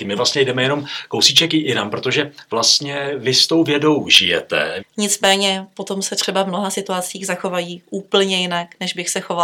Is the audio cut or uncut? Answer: cut